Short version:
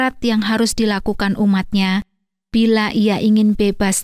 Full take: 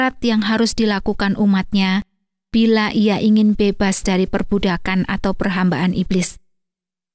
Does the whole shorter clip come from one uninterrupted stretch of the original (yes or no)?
yes